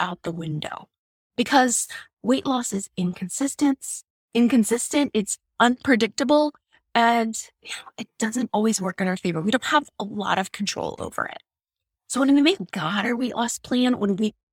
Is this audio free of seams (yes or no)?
yes